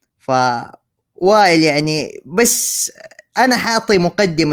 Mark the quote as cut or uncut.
uncut